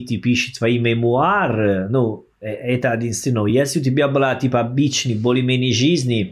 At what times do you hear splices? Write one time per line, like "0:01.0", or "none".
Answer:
none